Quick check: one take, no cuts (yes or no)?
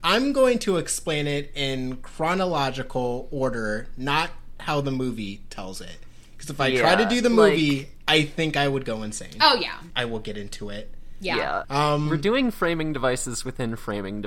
no